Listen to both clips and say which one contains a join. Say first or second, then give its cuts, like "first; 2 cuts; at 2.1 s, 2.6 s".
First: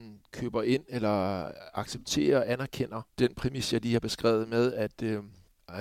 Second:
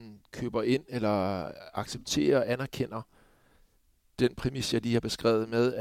first; 1 cut; at 3.1 s